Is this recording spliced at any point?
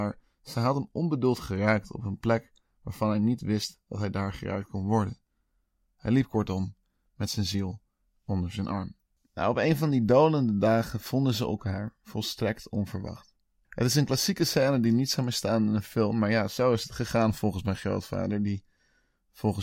no; 0 cuts

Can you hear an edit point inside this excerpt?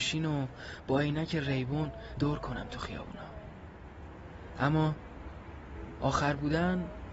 yes; 1 cut; at 2.2 s

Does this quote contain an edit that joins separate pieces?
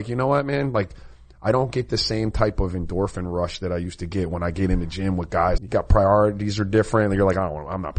yes; 1 cut; at 5.6 s

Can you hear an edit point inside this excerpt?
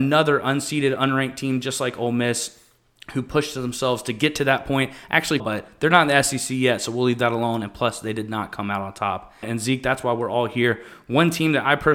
yes; 2 cuts; at 5.4 s, 9.4 s

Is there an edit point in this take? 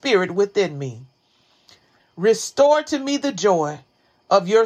yes; 1 cut; at 2.0 s

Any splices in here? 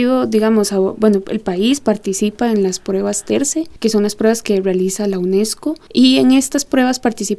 no; 0 cuts

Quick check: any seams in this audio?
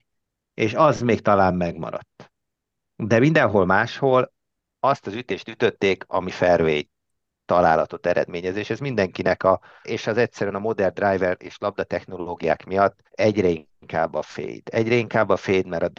yes; 2 cuts; at 9.8 s, 13.1 s

